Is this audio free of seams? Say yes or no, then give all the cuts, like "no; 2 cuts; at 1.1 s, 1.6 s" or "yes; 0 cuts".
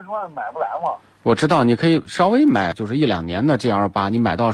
yes; 0 cuts